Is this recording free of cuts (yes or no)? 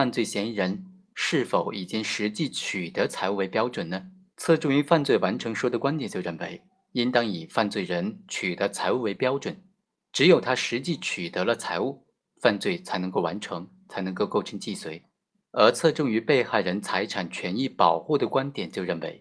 no